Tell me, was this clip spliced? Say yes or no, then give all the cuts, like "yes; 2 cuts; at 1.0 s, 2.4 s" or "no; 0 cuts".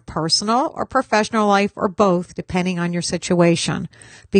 no; 0 cuts